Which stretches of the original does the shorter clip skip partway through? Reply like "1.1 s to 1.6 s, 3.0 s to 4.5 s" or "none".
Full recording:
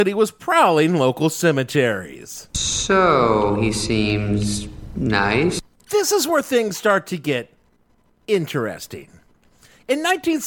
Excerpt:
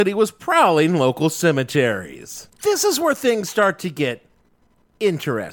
2.5 s to 5.8 s